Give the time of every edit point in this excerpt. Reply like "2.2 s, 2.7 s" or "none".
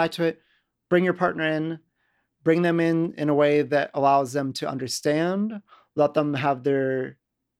none